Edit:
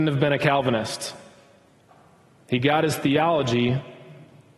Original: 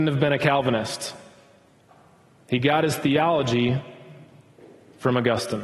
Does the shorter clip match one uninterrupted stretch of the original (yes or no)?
yes